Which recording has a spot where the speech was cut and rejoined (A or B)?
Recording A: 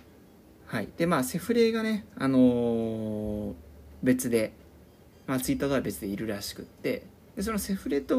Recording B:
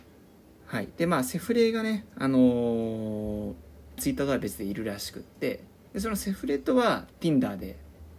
B